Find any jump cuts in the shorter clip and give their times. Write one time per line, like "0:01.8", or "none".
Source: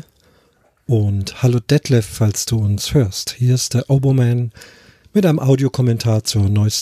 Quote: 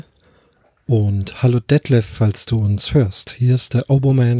none